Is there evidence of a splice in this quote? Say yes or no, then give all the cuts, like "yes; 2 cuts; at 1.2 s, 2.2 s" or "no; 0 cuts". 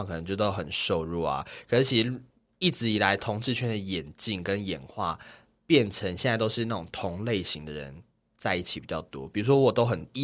no; 0 cuts